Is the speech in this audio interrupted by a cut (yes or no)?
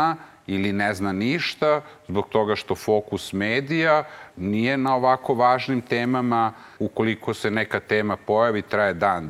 yes